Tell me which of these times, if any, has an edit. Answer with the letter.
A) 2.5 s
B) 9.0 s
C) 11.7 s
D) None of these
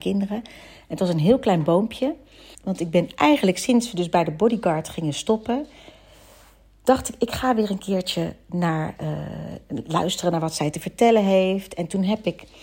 A